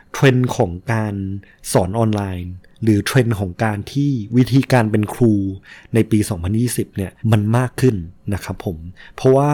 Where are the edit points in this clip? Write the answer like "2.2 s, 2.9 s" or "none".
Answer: 7.2 s

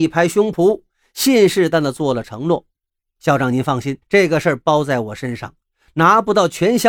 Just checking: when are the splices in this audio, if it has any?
1.7 s, 4.0 s

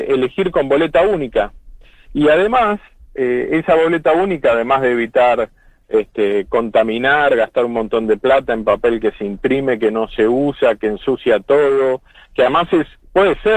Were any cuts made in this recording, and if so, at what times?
none

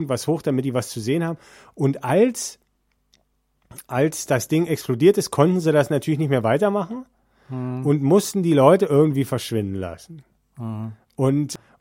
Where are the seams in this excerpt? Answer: none

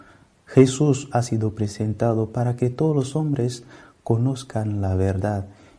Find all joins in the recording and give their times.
1.1 s

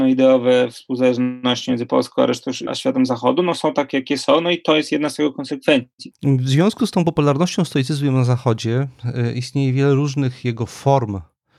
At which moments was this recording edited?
2.7 s, 6.1 s

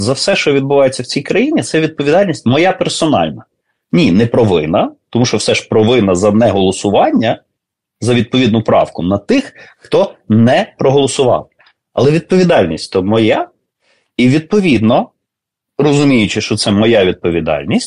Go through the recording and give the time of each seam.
none

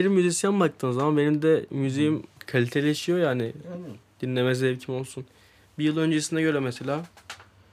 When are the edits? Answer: none

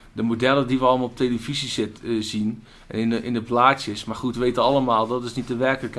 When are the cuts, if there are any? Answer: none

